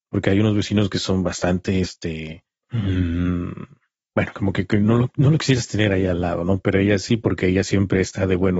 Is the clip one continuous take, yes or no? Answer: yes